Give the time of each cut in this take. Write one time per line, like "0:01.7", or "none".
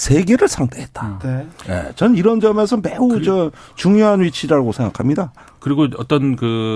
none